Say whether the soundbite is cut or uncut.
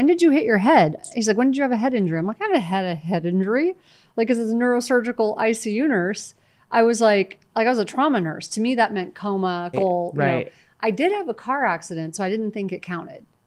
cut